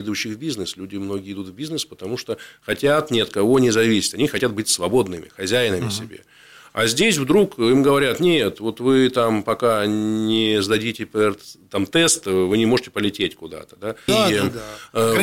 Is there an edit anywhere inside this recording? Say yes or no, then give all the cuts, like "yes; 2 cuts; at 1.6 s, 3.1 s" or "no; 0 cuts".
yes; 1 cut; at 14.1 s